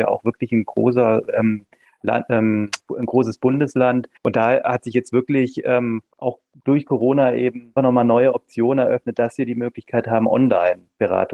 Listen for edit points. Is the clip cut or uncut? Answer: cut